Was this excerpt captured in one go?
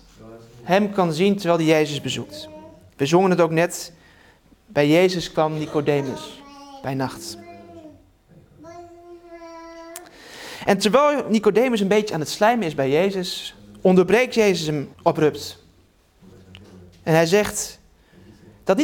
no; 1 cut; at 14.9 s

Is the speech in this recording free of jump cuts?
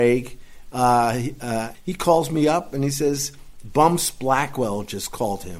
no; 1 cut; at 1.7 s

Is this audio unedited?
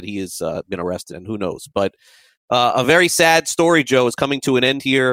no; 1 cut; at 1.1 s

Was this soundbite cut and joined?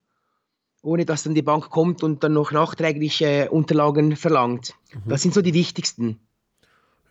yes; 1 cut; at 4.8 s

